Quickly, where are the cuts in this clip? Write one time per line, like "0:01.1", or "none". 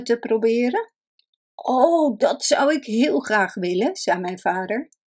none